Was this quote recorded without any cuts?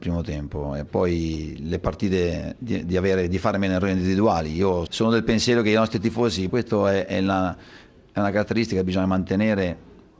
no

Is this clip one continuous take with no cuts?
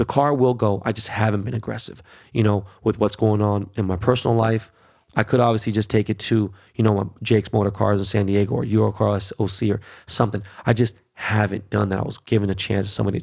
yes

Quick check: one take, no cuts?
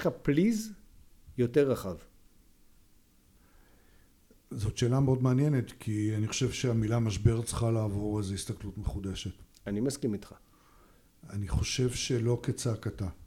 yes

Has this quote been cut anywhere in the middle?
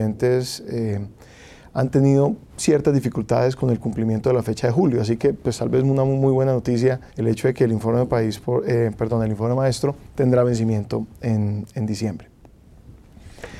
yes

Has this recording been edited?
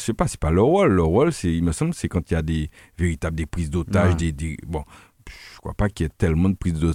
no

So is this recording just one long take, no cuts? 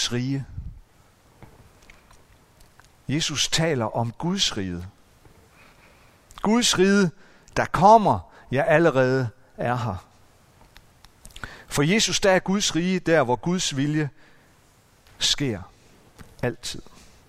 yes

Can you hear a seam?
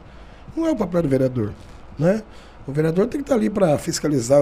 no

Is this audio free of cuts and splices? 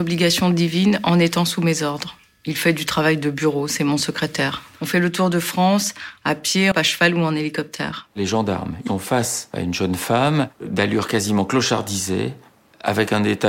no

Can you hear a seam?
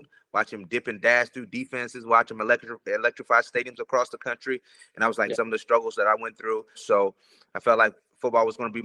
yes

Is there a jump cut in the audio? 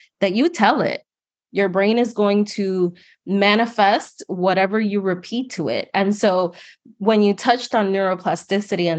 yes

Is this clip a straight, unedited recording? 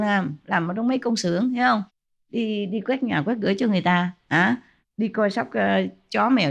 yes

